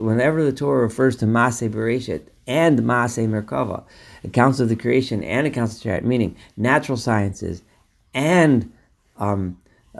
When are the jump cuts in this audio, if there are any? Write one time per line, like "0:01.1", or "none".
none

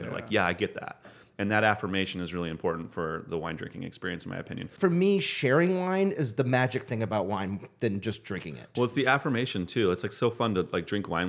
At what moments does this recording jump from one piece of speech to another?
0:04.8

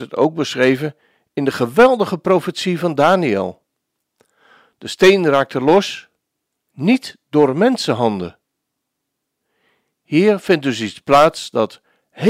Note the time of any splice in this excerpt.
none

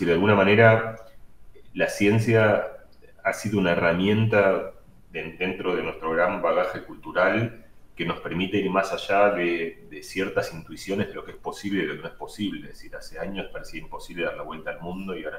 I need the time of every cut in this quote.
none

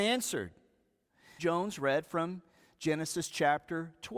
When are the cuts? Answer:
0:01.4

